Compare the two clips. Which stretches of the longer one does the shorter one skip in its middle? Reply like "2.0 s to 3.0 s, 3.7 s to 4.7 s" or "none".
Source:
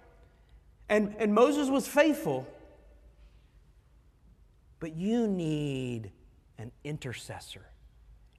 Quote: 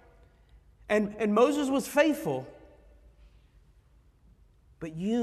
none